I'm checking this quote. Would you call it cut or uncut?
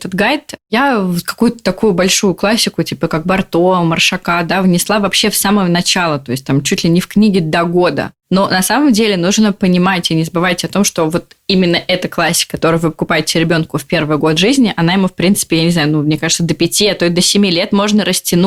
uncut